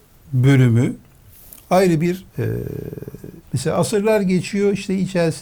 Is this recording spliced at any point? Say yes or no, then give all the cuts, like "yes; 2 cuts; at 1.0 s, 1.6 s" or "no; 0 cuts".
yes; 2 cuts; at 2.3 s, 3.4 s